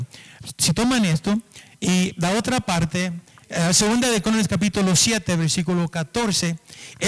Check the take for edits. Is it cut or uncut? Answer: cut